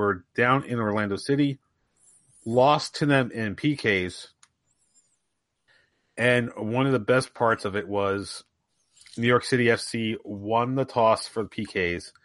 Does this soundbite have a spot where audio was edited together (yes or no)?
no